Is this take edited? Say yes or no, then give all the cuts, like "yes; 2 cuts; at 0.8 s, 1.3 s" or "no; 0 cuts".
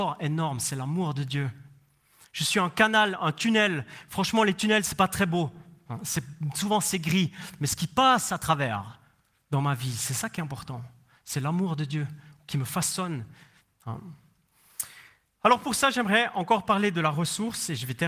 no; 0 cuts